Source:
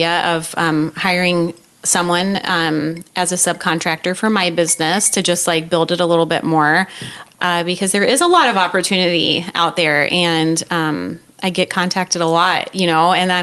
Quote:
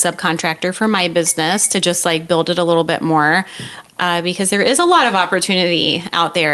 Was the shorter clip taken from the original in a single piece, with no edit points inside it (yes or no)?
yes